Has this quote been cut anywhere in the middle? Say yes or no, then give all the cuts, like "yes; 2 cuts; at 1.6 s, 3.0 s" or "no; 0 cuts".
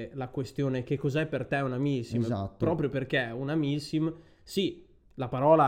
no; 0 cuts